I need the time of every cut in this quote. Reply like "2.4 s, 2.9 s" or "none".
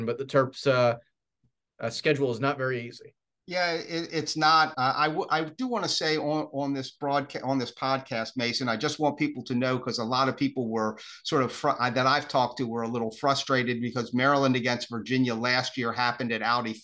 4.7 s